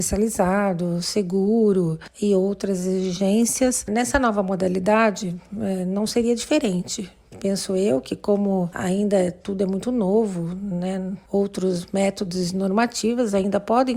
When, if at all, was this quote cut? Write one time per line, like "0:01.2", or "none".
none